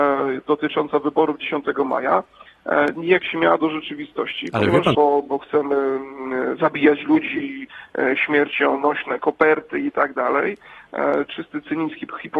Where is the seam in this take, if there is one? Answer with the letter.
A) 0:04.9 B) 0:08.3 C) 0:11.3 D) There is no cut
A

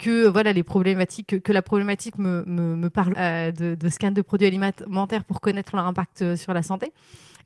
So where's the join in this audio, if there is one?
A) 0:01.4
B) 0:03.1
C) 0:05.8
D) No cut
B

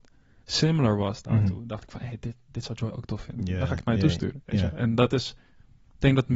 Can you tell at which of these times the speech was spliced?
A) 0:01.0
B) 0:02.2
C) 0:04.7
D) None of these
D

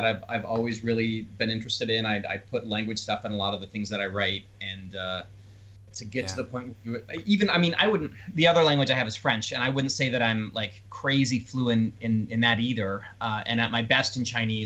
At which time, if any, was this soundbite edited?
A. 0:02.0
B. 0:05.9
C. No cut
B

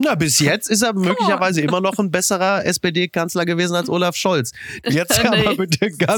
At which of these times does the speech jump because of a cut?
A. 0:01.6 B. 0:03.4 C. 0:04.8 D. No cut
C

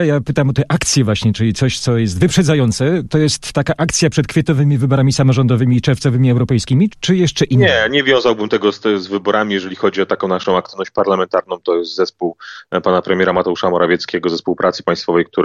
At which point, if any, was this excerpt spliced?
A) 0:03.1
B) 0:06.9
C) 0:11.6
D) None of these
B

